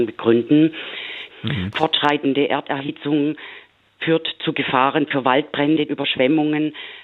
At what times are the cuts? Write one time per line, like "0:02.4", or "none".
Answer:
0:01.3
0:05.9